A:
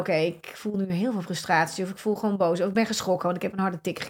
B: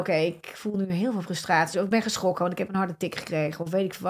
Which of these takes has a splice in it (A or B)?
B